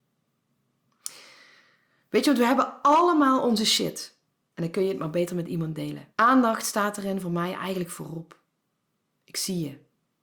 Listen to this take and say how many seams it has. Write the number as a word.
two